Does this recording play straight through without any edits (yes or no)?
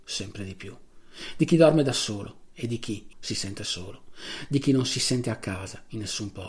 no